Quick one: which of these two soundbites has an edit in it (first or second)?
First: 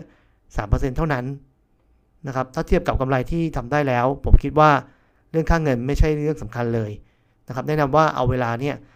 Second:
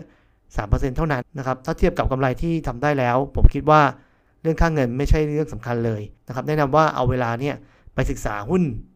second